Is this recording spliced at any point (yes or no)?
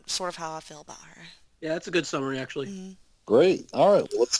no